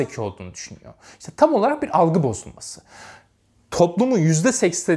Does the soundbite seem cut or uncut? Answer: uncut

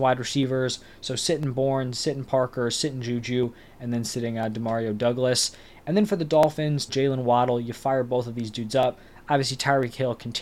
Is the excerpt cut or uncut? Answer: cut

